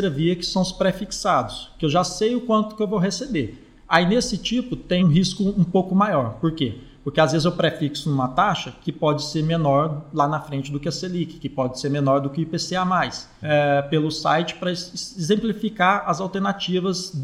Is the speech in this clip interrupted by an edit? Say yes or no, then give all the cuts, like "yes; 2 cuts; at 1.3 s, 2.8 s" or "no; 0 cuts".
yes; 2 cuts; at 5.0 s, 13.4 s